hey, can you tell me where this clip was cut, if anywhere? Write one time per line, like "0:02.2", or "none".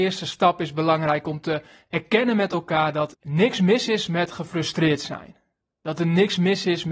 0:03.1

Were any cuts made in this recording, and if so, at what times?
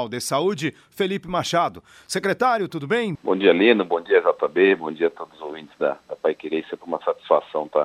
0:03.1

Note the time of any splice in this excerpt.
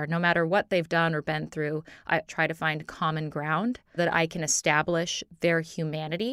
0:02.3
0:04.0

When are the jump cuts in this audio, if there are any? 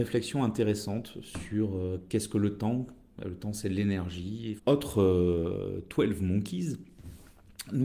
0:04.6

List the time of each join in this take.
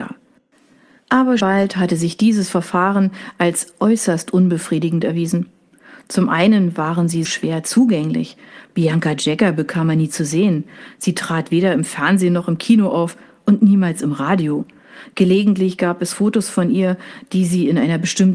0:01.4
0:07.2

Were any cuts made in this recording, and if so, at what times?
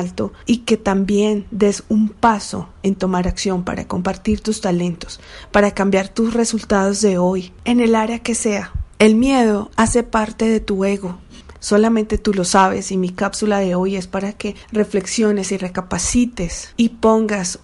0:08.9
0:11.5

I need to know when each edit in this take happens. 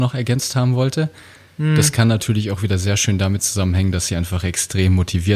none

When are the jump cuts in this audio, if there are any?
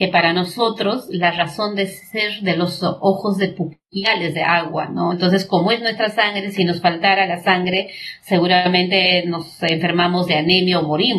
0:05.1

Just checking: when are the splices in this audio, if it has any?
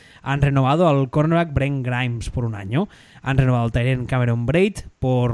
none

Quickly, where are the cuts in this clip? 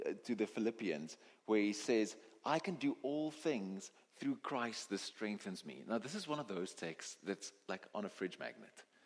none

